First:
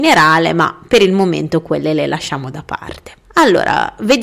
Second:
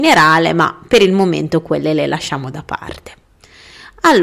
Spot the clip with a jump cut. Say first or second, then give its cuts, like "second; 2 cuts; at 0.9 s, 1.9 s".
first; 1 cut; at 3.2 s